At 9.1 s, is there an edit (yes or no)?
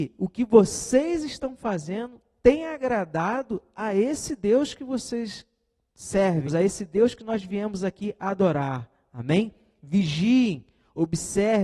no